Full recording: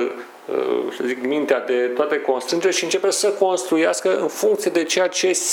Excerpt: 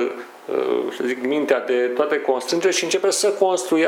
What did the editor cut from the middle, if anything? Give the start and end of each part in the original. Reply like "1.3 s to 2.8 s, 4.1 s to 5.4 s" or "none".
none